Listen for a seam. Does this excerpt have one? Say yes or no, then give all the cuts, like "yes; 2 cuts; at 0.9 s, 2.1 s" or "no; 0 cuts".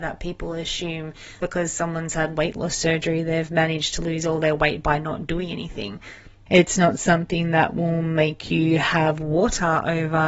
yes; 2 cuts; at 1.4 s, 6.5 s